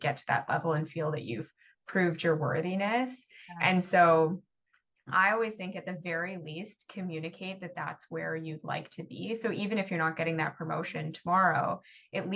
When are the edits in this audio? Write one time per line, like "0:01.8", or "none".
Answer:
none